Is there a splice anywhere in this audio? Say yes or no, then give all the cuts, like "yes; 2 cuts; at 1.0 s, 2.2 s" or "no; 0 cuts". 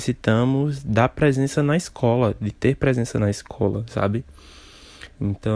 no; 0 cuts